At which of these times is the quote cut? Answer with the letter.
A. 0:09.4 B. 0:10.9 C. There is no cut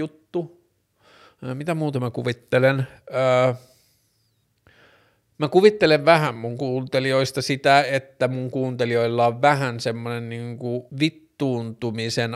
B